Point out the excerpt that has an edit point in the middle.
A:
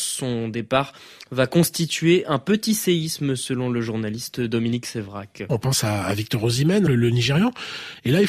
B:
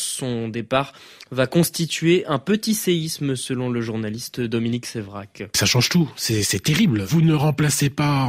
A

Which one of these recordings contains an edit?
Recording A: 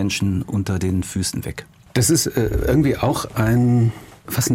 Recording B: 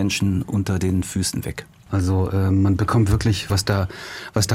B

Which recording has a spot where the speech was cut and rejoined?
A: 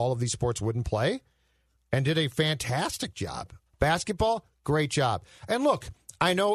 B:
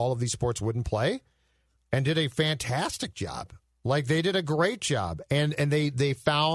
A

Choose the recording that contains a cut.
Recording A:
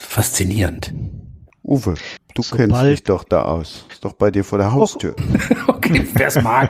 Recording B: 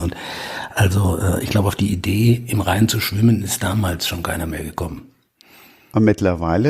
A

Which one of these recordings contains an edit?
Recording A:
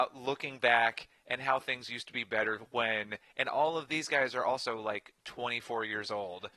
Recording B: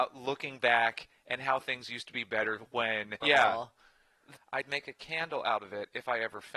B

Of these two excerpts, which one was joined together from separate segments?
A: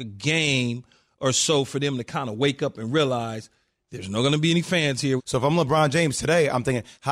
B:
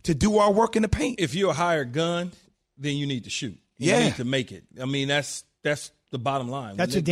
A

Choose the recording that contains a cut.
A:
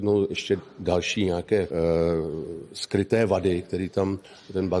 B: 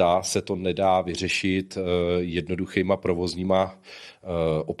A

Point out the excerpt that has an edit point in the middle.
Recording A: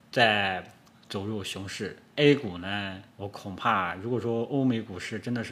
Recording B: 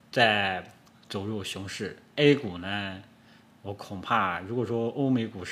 A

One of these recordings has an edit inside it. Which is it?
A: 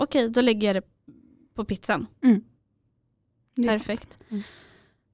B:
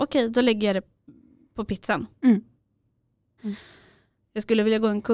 B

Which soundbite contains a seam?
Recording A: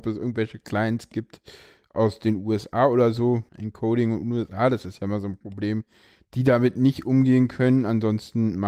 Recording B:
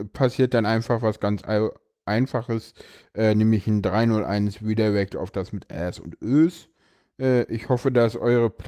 A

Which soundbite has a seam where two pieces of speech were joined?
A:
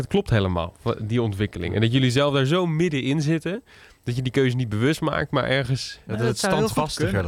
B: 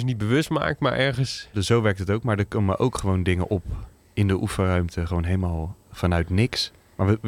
B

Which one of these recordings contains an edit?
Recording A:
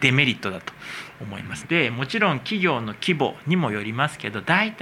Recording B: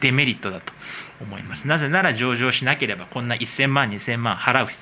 A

